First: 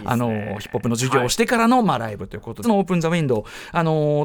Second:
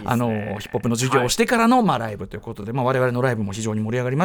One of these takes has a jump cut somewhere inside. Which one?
first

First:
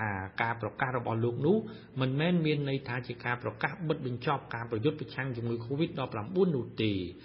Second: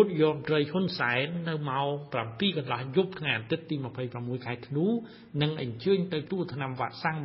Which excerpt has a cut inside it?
second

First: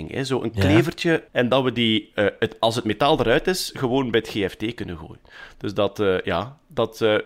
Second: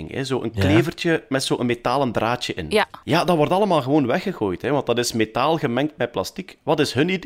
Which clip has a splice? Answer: first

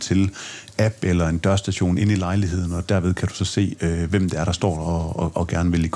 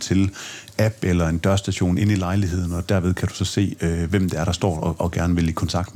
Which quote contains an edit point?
second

